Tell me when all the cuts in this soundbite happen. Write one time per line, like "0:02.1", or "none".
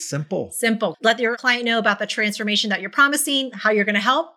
0:00.9